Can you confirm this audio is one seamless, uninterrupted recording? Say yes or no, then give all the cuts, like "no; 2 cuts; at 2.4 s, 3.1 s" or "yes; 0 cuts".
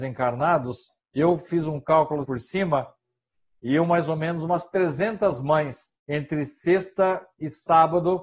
no; 2 cuts; at 2.2 s, 6.0 s